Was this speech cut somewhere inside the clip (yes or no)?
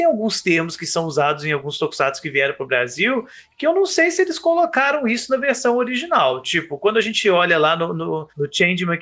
no